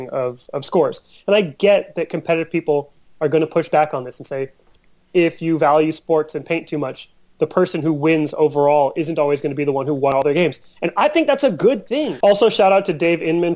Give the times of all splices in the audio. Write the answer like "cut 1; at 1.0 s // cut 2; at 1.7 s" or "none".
cut 1; at 12.2 s